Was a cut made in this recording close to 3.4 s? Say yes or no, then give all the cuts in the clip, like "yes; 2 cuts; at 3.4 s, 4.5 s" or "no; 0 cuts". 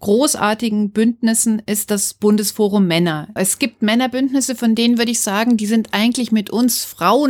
yes; 1 cut; at 3.4 s